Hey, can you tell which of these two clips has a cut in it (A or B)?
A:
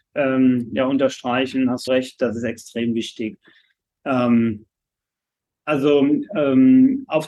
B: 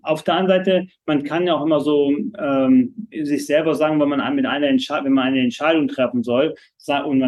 A